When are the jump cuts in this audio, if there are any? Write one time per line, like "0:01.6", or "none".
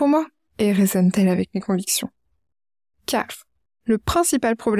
none